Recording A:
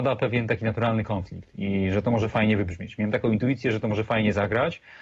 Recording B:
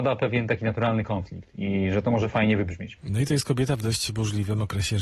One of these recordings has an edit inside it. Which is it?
B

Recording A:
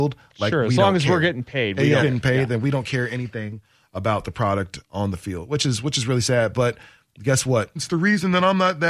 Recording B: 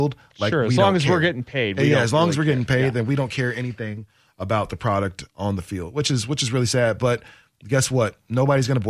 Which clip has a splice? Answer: A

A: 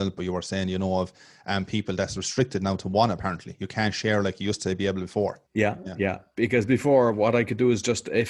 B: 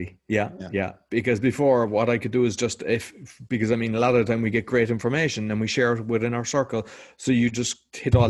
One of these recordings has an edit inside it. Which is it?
A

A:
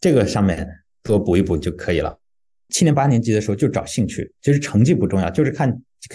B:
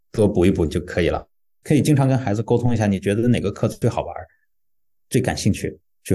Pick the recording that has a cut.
B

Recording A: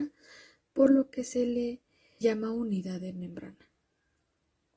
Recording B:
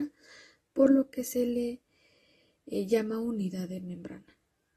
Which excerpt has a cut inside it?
A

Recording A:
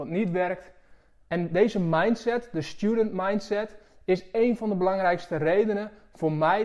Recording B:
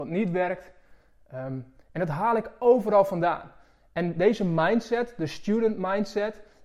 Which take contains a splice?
A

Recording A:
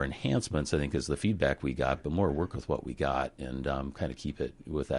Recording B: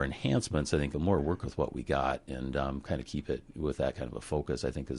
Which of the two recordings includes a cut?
B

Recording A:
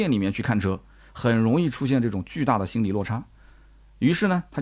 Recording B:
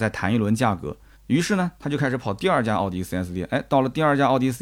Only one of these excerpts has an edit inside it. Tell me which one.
B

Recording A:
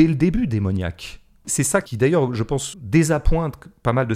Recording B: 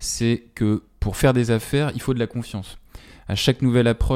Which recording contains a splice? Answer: A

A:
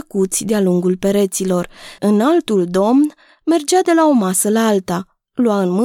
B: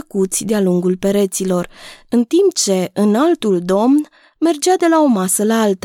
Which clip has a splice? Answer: A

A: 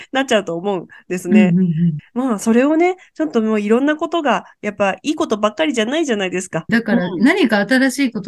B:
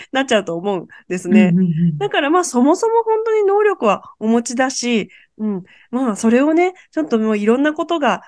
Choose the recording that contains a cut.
A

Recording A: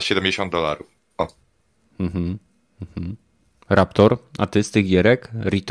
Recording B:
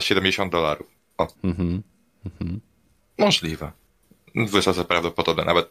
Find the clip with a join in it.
B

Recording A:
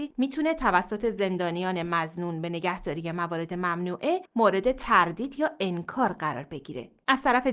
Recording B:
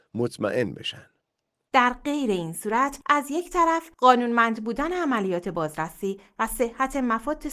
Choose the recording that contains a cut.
B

